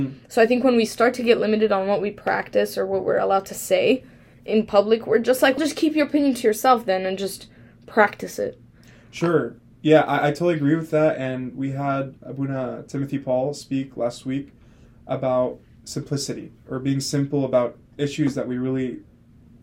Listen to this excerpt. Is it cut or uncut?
cut